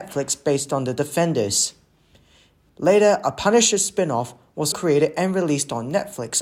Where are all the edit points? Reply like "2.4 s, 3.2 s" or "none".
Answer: 2.7 s, 4.7 s